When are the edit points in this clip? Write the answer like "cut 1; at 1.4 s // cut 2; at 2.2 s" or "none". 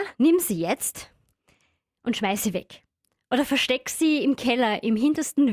none